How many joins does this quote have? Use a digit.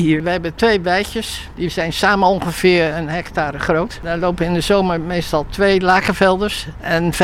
0